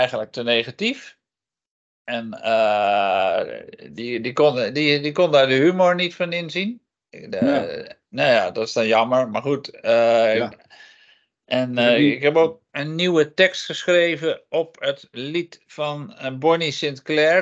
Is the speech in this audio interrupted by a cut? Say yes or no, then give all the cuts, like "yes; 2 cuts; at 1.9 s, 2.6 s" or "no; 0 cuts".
no; 0 cuts